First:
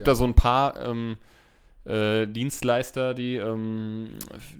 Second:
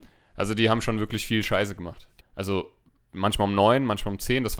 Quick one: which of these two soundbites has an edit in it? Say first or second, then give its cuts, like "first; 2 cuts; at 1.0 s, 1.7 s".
second; 1 cut; at 2.2 s